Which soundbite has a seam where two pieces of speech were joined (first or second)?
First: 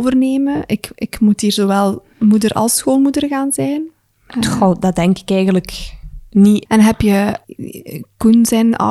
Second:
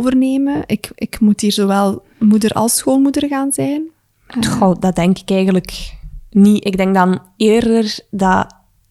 first